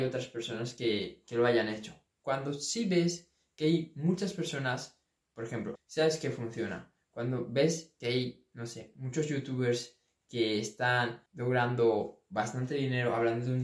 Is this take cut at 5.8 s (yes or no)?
yes